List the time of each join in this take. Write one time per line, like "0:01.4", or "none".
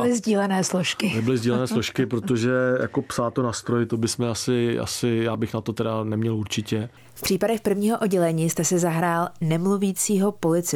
none